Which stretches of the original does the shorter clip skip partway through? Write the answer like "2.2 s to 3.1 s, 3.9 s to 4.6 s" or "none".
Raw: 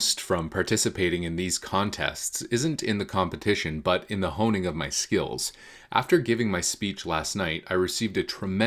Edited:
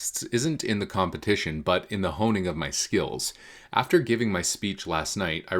none